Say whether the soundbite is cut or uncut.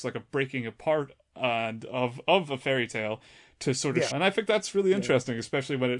cut